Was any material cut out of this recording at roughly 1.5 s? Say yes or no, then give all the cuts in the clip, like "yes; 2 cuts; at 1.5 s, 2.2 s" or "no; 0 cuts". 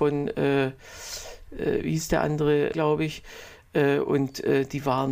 no; 1 cut; at 2.7 s